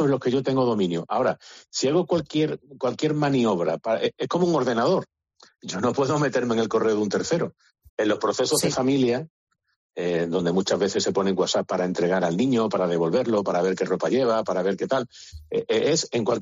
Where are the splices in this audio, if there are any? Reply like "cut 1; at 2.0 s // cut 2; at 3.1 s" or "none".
cut 1; at 7.9 s